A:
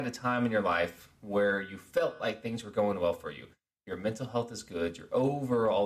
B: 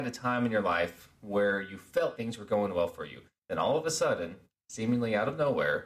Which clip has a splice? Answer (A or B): B